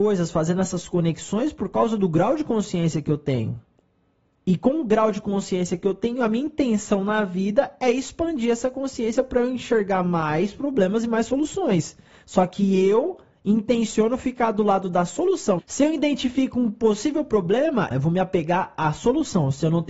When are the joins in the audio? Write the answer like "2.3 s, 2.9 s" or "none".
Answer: 15.6 s, 17.9 s